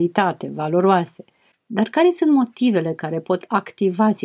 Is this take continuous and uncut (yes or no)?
no